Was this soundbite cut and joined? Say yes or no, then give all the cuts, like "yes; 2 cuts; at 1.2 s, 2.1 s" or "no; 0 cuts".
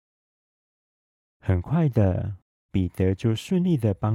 no; 0 cuts